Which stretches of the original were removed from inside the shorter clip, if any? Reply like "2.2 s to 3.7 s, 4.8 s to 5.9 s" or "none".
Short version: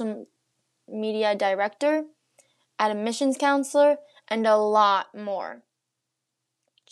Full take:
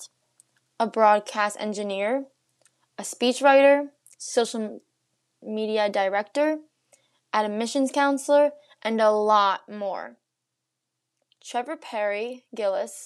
none